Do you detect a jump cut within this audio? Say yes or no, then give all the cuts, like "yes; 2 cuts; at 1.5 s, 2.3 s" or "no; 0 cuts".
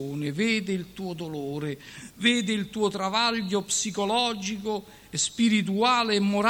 no; 0 cuts